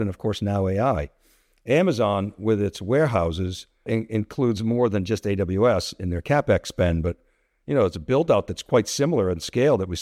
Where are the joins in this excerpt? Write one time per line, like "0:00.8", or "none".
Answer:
0:03.9